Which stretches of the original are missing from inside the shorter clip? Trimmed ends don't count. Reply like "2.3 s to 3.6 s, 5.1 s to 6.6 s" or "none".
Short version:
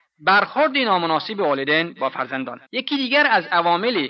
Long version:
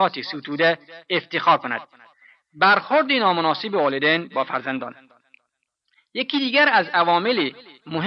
5.0 s to 6.1 s